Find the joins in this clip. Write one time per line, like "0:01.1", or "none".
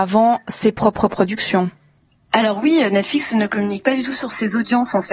none